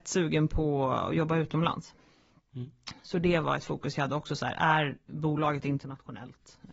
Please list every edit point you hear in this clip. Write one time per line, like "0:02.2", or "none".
none